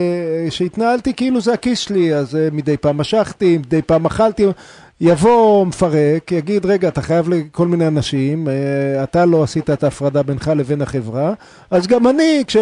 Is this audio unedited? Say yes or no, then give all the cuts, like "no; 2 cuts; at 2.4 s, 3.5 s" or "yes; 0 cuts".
yes; 0 cuts